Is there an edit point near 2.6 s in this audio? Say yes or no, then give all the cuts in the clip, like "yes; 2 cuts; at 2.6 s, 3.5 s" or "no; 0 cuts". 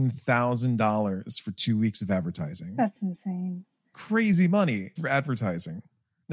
no; 2 cuts; at 3.8 s, 5.0 s